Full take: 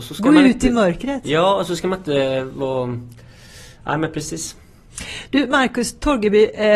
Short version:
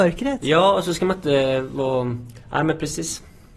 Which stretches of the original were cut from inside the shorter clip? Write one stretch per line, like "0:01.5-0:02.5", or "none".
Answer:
0:03.2-0:03.8